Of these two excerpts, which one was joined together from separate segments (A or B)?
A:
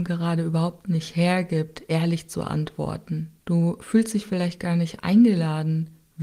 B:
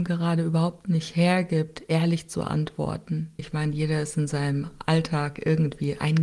B